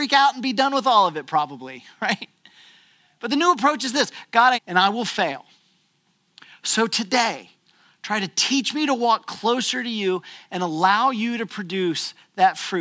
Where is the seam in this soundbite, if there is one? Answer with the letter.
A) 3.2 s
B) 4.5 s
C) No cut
B